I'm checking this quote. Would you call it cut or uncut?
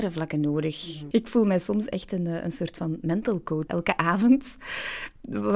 cut